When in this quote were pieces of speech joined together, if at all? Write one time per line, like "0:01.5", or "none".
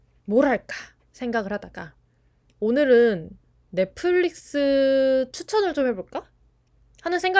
none